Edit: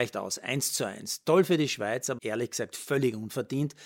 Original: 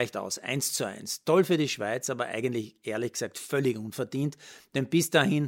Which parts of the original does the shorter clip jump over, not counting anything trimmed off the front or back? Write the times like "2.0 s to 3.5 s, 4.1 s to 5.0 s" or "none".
2.2 s to 2.8 s